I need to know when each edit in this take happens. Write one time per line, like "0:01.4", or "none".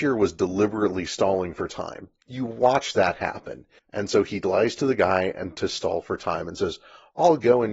0:03.8